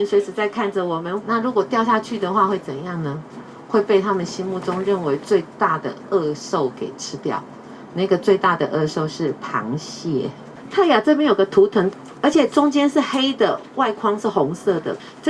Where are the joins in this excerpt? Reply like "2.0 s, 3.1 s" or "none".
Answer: 1.2 s, 12.1 s